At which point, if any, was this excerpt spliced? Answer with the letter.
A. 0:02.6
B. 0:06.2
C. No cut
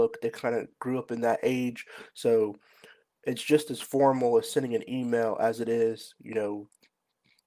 C